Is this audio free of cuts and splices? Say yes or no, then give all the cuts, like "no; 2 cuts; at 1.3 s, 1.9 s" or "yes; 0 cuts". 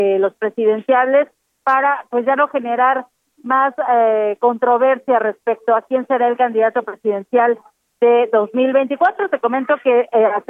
yes; 0 cuts